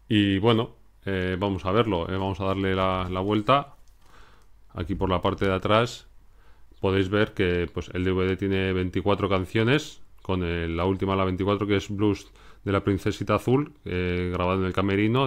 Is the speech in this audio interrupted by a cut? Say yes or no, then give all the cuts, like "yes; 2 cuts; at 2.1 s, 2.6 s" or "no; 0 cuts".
no; 0 cuts